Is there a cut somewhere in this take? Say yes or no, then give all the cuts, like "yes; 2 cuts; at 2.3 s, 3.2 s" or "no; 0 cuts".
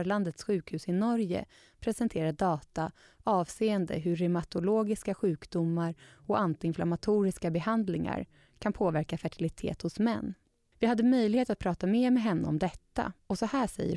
no; 0 cuts